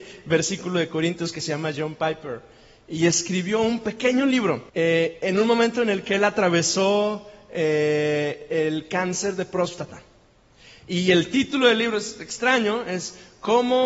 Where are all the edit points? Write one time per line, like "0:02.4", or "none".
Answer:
0:04.7